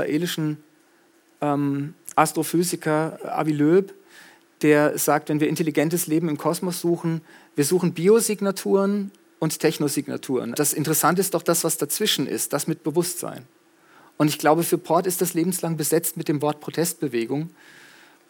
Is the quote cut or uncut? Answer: cut